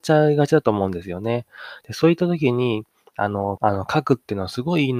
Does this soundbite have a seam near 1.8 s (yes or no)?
yes